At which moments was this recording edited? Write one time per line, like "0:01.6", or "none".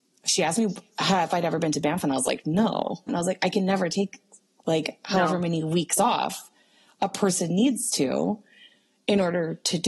0:03.1

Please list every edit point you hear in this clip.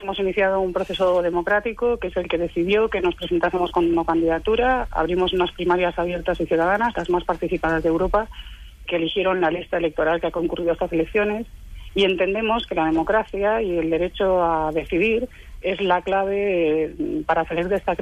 0:08.9
0:15.6

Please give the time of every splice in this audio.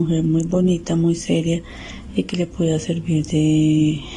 none

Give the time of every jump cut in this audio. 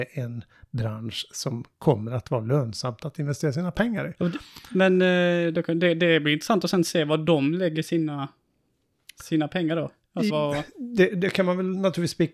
0:10.3

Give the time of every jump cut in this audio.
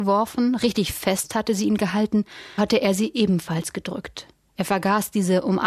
0:02.6

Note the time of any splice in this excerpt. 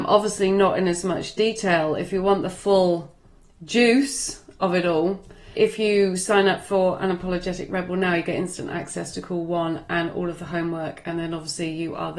0:05.5

